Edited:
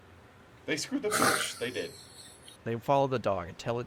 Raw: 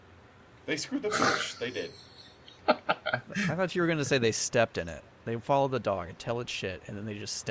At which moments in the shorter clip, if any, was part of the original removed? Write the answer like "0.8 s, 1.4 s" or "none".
2.6 s